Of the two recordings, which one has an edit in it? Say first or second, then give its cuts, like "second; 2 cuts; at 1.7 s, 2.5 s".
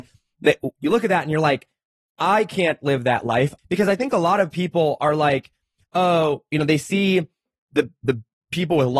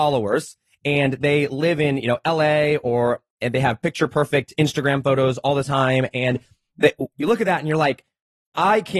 first; 1 cut; at 3.6 s